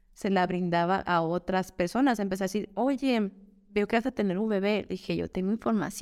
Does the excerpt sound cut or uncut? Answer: uncut